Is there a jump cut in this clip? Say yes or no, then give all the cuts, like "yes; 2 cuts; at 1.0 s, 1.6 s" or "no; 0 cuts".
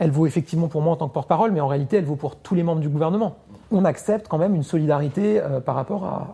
yes; 1 cut; at 3.6 s